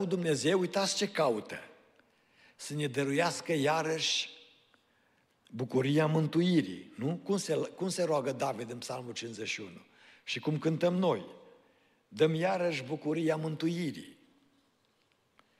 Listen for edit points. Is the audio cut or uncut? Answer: uncut